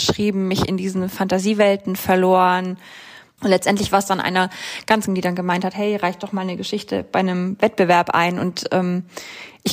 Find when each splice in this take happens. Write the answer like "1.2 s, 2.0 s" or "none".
3.4 s, 5.1 s